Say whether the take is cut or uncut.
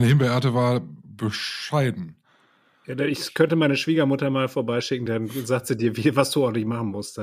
uncut